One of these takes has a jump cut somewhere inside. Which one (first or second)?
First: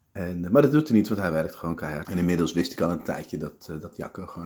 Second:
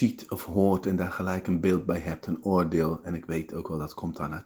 first